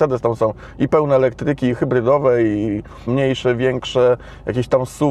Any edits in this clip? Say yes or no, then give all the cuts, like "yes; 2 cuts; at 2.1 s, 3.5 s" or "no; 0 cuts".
yes; 1 cut; at 3.1 s